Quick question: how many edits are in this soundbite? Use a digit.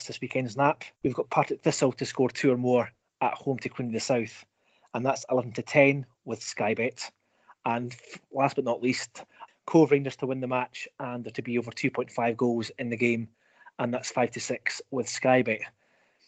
2